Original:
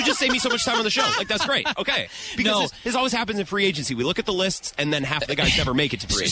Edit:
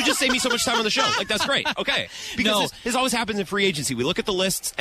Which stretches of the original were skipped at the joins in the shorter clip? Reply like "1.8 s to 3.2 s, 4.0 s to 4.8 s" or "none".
none